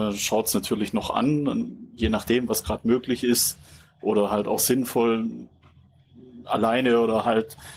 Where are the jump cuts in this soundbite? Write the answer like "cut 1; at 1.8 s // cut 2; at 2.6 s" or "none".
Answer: none